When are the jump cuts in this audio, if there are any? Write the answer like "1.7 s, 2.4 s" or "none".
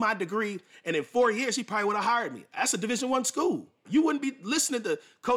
3.8 s